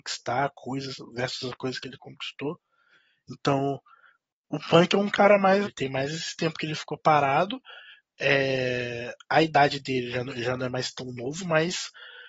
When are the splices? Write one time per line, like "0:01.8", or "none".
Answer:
0:05.6

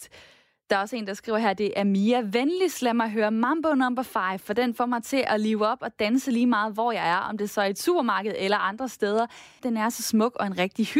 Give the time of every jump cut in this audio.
0:09.6

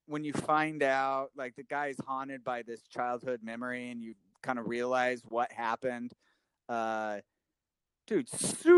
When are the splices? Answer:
none

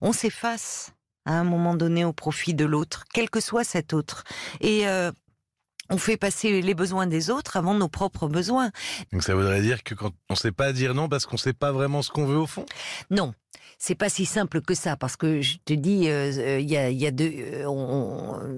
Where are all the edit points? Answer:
0:09.0

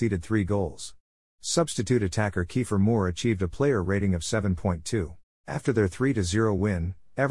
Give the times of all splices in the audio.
0:05.3

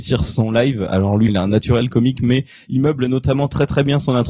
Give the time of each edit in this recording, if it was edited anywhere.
0:01.3

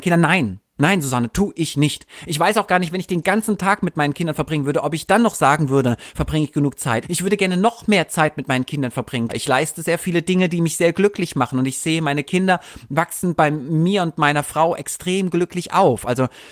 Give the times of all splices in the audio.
0:07.0
0:09.3

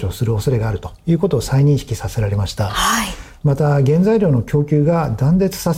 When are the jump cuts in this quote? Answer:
none

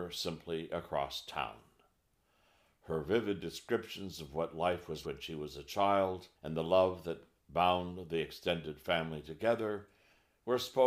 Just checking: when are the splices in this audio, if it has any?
0:05.0
0:06.4

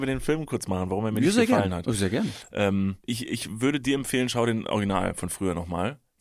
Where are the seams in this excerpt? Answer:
0:03.0

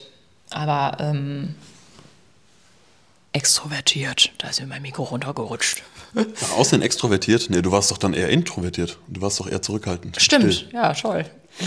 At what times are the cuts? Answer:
none

